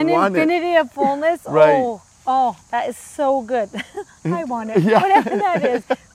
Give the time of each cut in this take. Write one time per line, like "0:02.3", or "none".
none

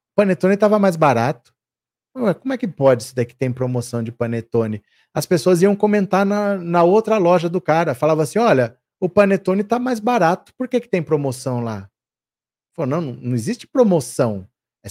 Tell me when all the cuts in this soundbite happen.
0:08.8

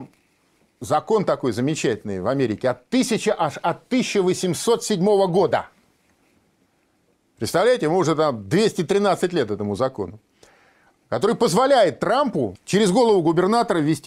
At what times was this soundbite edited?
0:12.5

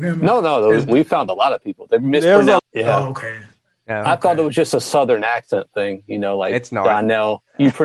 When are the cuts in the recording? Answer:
0:02.6

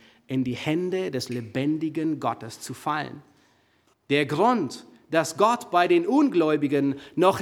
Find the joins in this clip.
0:03.9

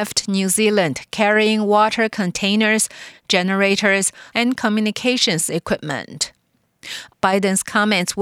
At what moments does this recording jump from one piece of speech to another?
0:03.1
0:04.3
0:07.1

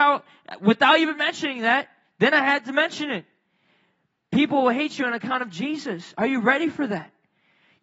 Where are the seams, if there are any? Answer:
none

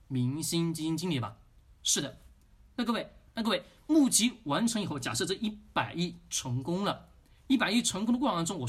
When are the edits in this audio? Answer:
0:01.8
0:03.3

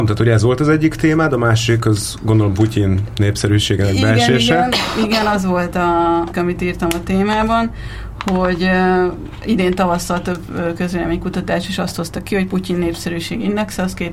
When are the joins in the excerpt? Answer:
0:06.3

